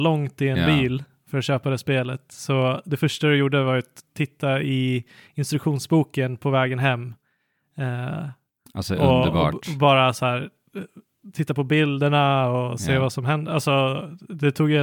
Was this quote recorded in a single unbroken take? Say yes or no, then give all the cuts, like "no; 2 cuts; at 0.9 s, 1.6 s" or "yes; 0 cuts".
yes; 0 cuts